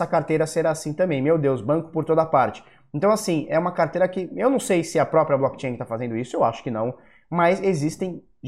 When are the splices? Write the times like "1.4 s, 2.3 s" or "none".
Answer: none